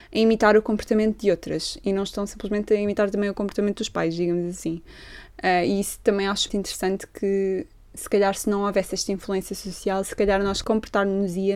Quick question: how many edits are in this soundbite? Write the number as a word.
one